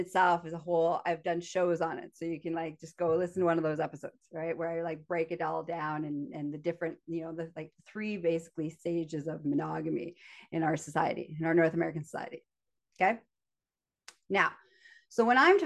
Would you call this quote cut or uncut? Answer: uncut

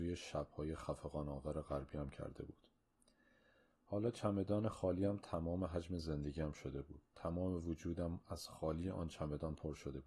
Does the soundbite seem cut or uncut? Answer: uncut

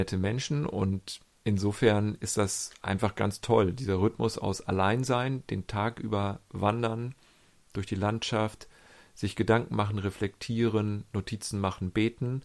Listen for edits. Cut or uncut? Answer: uncut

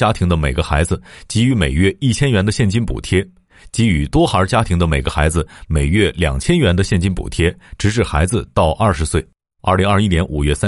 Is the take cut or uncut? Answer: cut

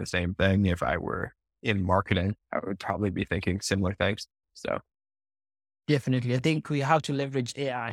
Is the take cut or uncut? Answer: cut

